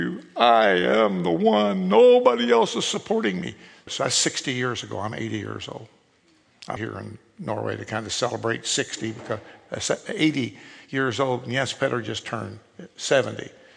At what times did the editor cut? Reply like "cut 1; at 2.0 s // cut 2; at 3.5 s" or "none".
cut 1; at 3.9 s // cut 2; at 6.8 s